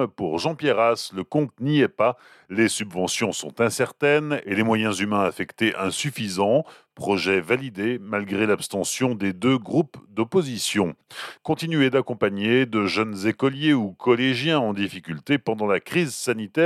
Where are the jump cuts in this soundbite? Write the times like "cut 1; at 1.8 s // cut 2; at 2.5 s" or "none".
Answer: none